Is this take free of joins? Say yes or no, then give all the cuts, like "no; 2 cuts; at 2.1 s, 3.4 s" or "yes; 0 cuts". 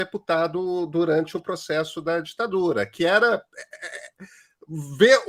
yes; 0 cuts